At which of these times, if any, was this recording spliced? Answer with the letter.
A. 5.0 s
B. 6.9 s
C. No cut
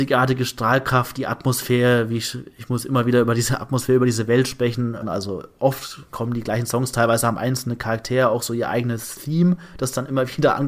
A